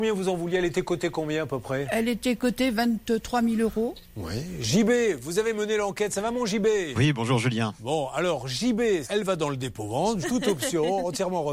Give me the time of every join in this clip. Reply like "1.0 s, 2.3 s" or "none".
9.0 s, 10.2 s